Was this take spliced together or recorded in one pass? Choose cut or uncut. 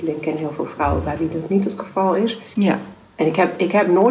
cut